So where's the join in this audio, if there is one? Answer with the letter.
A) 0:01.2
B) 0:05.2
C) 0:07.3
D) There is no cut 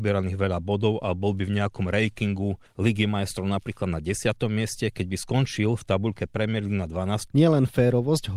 C